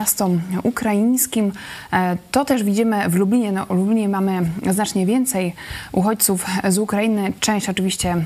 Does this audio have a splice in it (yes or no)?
no